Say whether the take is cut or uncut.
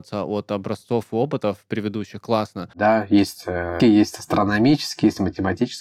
cut